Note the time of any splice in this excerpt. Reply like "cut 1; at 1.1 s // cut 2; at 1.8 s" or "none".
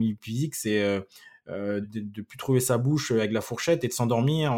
cut 1; at 1.8 s